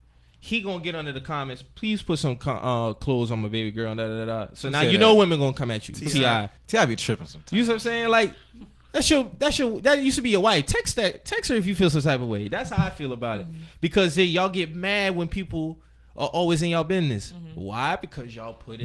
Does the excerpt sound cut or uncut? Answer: cut